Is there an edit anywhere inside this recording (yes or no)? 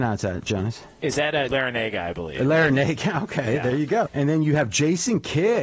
yes